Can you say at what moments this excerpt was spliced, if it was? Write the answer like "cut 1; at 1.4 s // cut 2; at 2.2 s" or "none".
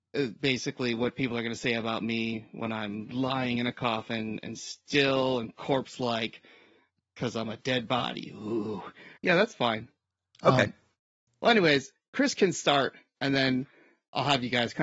cut 1; at 9.2 s

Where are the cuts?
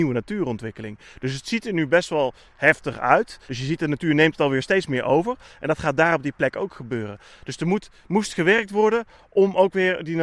cut 1; at 3.5 s

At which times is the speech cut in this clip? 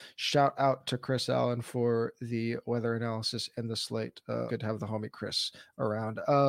cut 1; at 4.5 s

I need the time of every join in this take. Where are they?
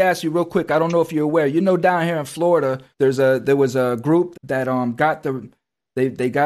cut 1; at 2.9 s // cut 2; at 4.3 s

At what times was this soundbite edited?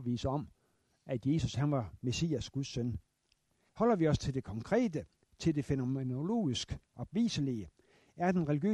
cut 1; at 3.7 s // cut 2; at 6.8 s

